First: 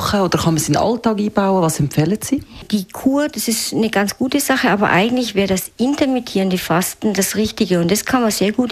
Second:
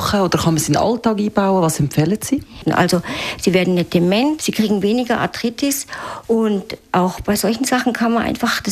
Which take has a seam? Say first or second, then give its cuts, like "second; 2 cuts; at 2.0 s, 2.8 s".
second; 2 cuts; at 2.7 s, 4.4 s